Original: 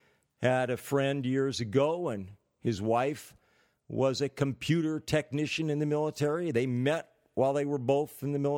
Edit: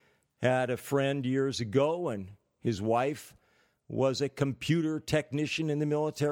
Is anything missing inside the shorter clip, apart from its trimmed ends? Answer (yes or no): no